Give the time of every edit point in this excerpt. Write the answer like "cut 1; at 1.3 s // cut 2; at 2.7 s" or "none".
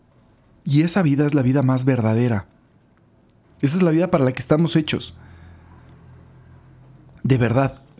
cut 1; at 3.4 s

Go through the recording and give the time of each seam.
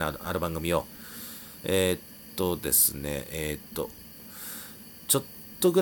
cut 1; at 1.6 s

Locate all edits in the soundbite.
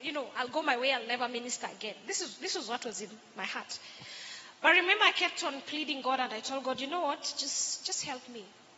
none

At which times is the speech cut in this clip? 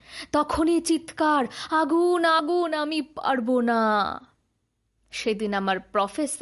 cut 1; at 2.4 s

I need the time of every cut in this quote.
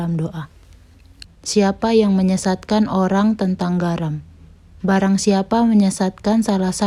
cut 1; at 1.2 s

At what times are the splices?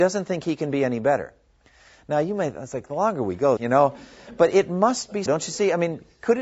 cut 1; at 3.6 s // cut 2; at 5.3 s

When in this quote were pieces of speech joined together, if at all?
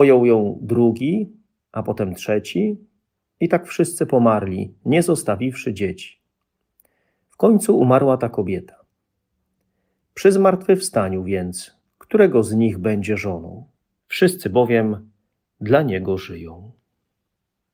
cut 1; at 14.0 s

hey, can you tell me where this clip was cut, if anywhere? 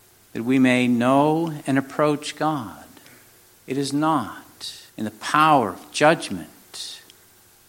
cut 1; at 3.6 s // cut 2; at 4.9 s

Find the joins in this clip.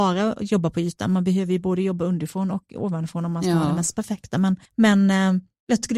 cut 1; at 4.7 s

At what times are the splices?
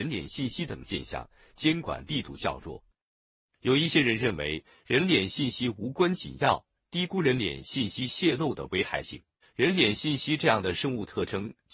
cut 1; at 9.4 s

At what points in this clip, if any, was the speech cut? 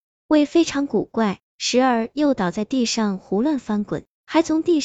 cut 1; at 1.5 s

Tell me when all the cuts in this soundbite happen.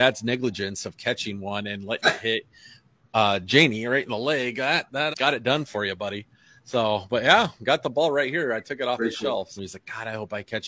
cut 1; at 5.1 s // cut 2; at 9.6 s

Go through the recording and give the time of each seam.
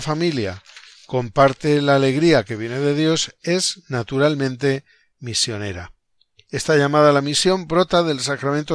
none

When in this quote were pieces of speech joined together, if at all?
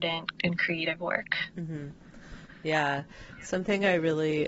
none

